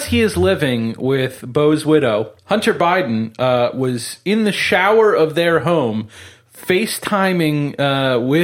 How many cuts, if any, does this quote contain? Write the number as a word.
one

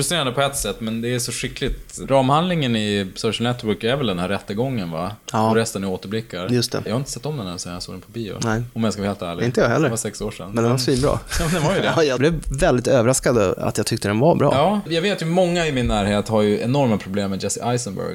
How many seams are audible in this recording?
one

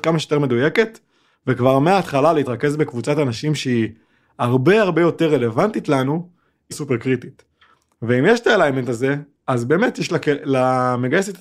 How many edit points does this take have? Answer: one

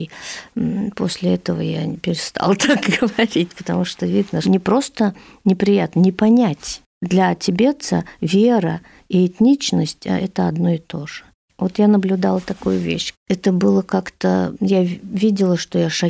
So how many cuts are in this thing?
two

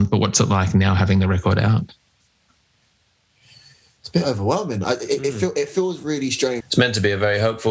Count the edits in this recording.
one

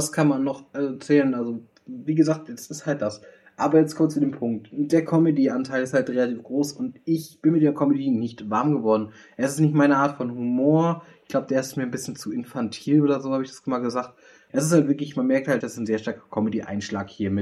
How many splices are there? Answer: two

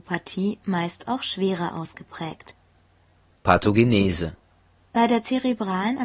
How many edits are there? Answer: zero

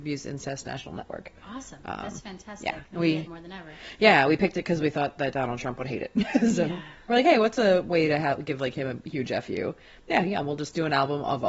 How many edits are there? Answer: one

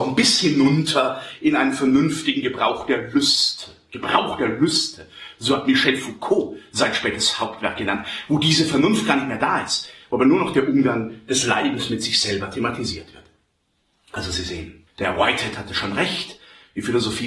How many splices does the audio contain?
one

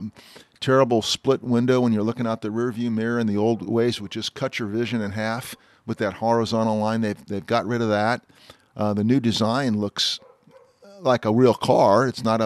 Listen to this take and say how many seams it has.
zero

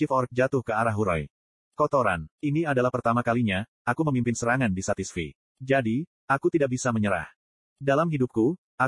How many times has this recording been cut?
zero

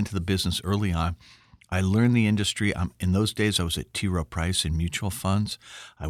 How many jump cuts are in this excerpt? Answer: zero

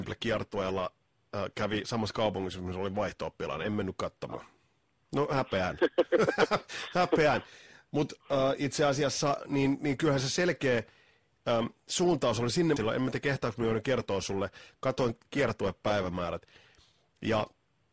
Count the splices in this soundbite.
two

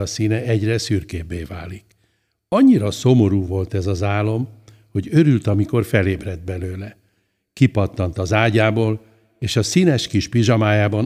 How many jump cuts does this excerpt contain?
zero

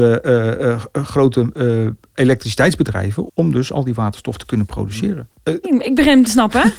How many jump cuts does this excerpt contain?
two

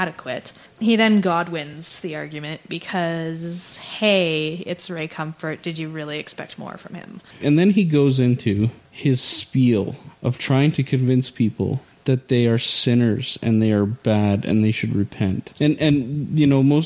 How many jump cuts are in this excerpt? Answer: two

